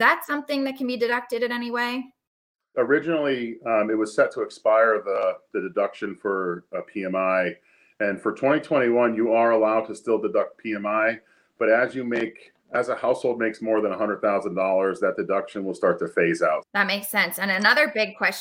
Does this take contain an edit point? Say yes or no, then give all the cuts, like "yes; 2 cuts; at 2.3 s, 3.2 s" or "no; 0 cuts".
yes; 2 cuts; at 2.7 s, 16.6 s